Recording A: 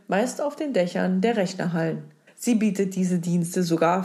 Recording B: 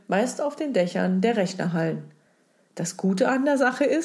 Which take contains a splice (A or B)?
A